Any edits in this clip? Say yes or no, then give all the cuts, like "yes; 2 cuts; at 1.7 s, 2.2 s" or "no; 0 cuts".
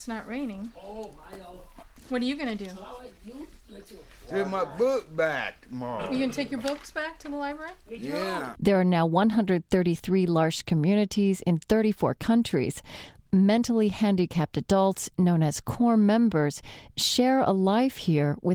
yes; 1 cut; at 8.6 s